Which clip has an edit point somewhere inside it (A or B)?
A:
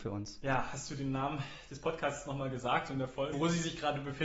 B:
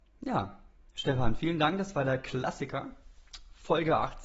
A